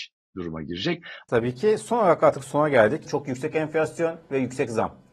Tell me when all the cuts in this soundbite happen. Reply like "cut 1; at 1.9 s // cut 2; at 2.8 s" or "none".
cut 1; at 1.3 s // cut 2; at 3.1 s